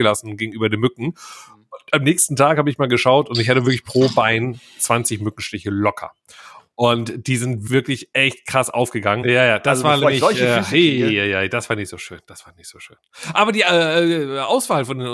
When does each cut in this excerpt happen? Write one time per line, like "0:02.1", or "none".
0:07.7
0:09.2